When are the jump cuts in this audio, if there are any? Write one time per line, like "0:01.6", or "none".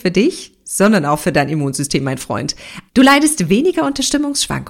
0:02.9